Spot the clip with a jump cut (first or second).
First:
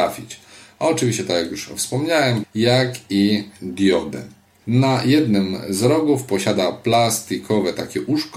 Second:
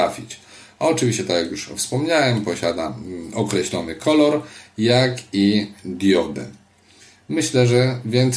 first